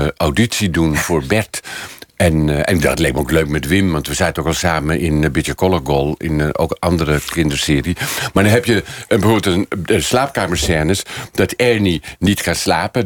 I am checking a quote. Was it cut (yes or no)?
no